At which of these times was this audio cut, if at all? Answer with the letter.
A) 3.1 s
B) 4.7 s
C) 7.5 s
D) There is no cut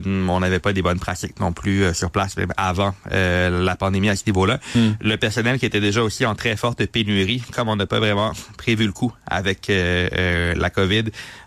D